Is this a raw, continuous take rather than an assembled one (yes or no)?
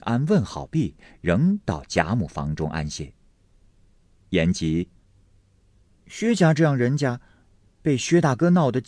yes